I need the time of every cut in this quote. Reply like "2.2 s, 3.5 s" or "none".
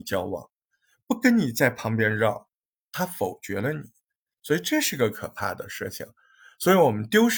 none